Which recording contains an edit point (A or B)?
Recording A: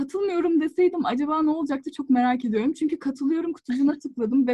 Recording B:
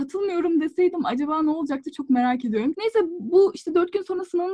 B